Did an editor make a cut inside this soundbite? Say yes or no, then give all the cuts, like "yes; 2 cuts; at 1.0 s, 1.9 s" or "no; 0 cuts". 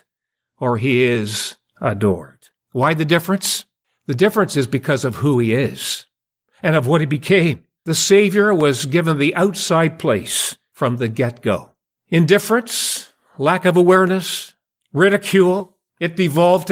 yes; 1 cut; at 7.8 s